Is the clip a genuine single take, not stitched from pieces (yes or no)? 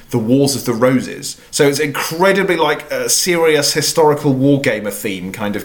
yes